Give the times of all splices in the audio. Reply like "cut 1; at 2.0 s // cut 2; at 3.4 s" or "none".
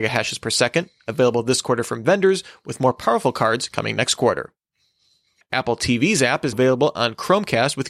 cut 1; at 5.4 s // cut 2; at 6.5 s